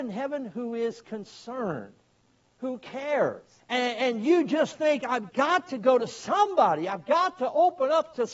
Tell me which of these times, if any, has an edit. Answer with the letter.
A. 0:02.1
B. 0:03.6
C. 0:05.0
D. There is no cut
B